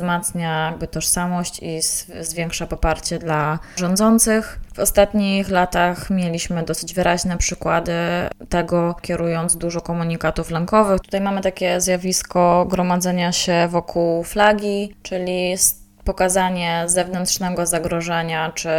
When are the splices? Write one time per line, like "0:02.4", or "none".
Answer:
0:09.0
0:11.0